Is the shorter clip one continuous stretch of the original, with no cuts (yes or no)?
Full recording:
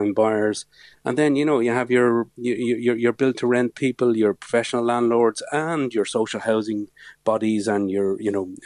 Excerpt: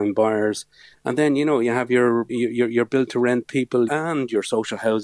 no